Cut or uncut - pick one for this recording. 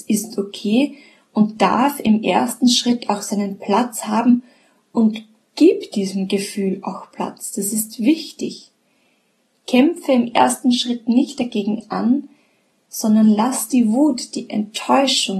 uncut